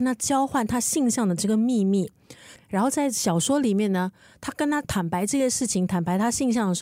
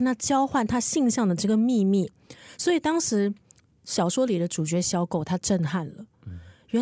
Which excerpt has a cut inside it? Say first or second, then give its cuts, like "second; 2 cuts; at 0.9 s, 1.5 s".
first; 1 cut; at 2.6 s